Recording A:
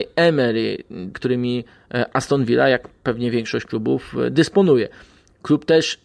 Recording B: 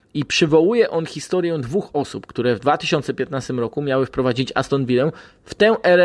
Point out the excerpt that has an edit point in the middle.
A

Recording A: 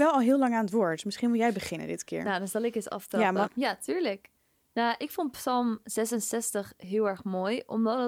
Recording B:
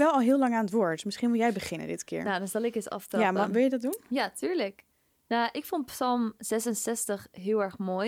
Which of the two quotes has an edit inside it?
A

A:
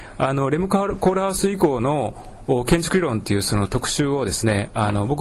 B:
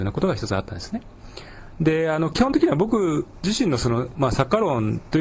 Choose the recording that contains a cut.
B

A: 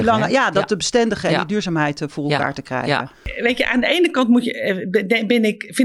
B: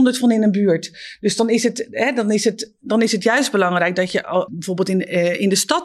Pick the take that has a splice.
B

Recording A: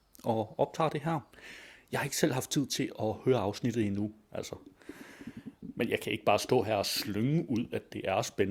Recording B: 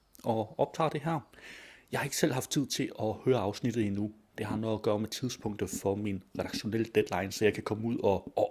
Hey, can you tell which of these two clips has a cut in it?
A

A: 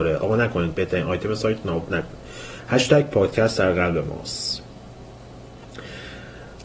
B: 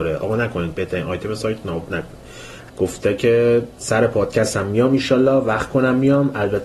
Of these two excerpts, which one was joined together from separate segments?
B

